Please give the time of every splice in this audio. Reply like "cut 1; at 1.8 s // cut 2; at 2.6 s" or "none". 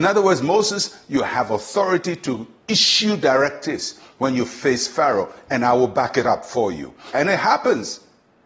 cut 1; at 7.1 s